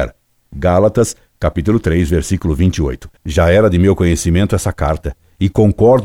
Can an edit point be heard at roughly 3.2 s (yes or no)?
yes